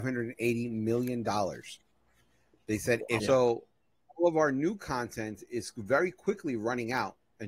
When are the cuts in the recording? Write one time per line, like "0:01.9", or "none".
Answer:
0:03.2